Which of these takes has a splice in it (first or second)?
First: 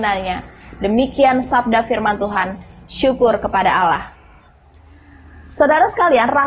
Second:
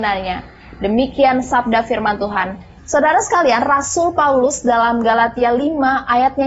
second